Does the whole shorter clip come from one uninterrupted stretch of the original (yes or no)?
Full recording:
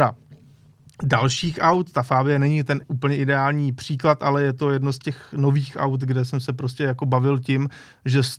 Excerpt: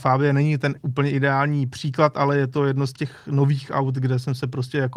yes